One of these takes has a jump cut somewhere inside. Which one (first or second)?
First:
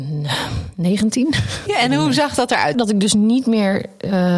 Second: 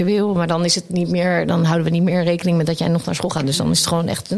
first